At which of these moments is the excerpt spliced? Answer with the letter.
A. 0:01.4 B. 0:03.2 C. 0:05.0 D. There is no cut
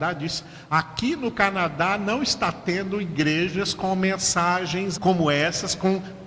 C